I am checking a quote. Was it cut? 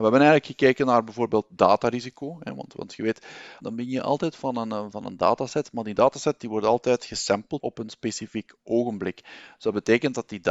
yes; 2 cuts; at 3.6 s, 7.6 s

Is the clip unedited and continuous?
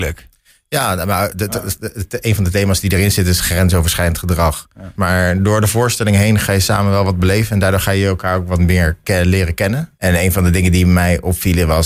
no; 2 cuts; at 5.0 s, 10.0 s

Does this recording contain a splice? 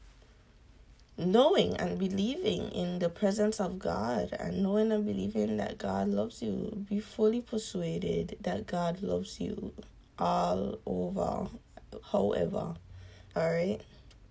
yes; 2 cuts; at 12.0 s, 13.3 s

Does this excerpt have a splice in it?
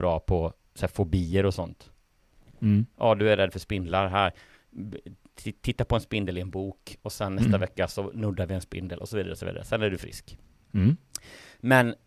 no; 0 cuts

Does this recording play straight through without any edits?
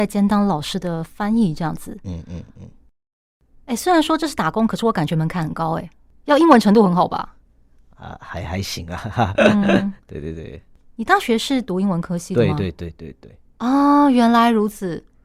yes; 0 cuts

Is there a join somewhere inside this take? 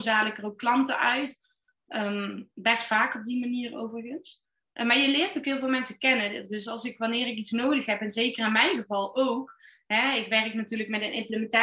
no; 0 cuts

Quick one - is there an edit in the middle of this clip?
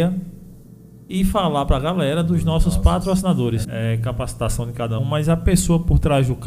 yes; 2 cuts; at 3.6 s, 5.0 s

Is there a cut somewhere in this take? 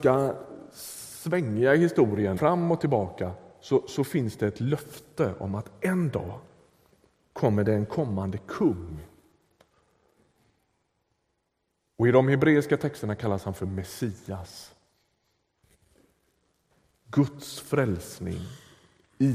yes; 1 cut; at 2.4 s

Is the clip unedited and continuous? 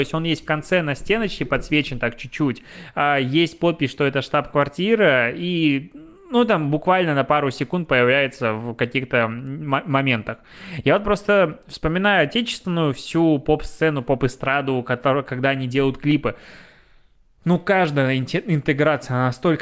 yes; 0 cuts

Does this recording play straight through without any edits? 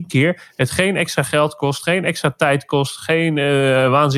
yes; 0 cuts

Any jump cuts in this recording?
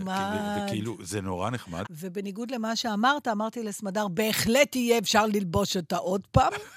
yes; 1 cut; at 1.8 s

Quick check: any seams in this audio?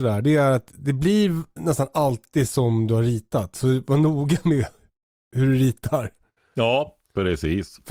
no; 0 cuts

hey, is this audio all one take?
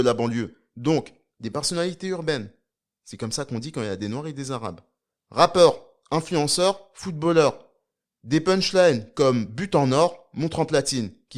yes; 0 cuts

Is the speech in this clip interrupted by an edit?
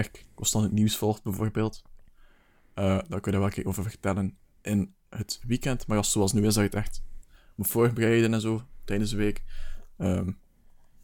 no; 0 cuts

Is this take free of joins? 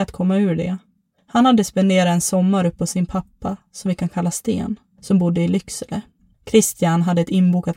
no; 1 cut; at 6.3 s

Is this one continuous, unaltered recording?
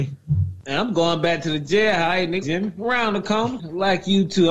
no; 2 cuts; at 2.4 s, 3.6 s

